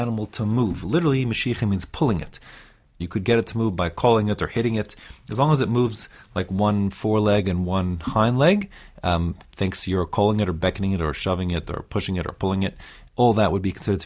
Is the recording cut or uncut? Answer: cut